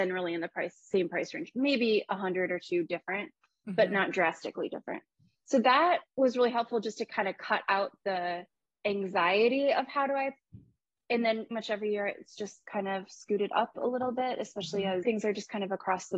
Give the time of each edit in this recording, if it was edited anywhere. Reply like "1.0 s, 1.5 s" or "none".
11.5 s, 15.0 s